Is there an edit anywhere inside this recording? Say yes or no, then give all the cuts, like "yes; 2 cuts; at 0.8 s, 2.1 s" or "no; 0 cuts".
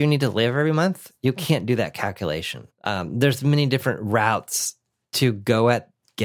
yes; 1 cut; at 2.7 s